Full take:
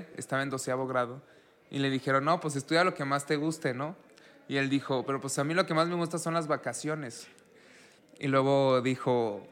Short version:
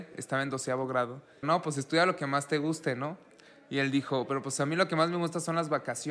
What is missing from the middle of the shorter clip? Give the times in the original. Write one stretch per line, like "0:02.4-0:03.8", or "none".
0:01.4-0:02.2